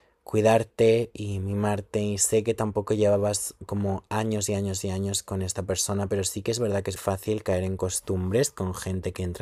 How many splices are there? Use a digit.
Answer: 1